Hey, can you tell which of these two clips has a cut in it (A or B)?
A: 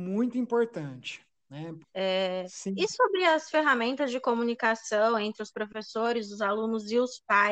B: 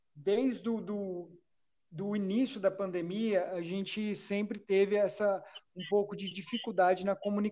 A